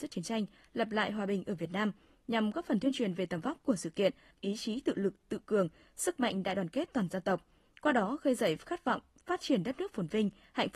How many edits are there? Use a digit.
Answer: 1